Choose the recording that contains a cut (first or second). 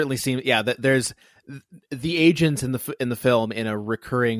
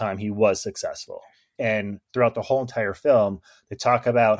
second